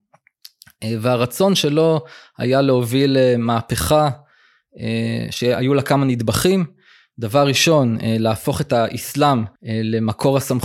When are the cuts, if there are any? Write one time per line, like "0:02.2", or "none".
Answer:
0:09.6